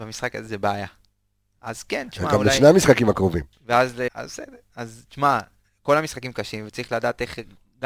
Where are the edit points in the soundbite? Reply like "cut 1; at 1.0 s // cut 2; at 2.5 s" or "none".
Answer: cut 1; at 4.1 s